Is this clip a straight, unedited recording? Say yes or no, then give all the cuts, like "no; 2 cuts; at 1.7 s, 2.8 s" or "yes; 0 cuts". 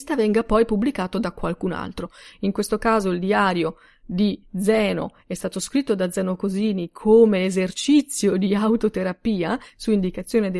yes; 0 cuts